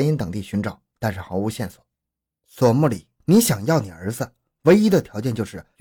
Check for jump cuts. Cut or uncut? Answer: cut